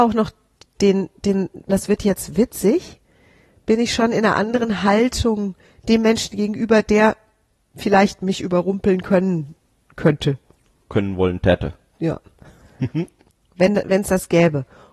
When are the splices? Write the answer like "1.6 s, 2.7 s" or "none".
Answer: 1.7 s